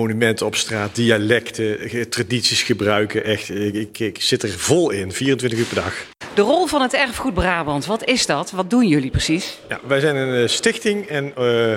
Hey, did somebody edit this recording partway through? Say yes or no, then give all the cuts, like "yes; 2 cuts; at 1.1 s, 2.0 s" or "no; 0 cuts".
no; 0 cuts